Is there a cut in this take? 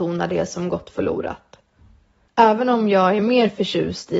yes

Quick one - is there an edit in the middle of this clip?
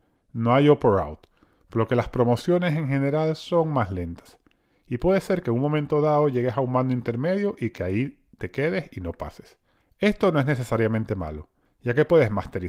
no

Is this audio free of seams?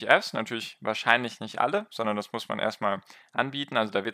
yes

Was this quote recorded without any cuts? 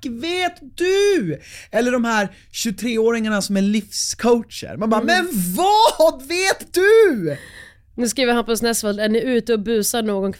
yes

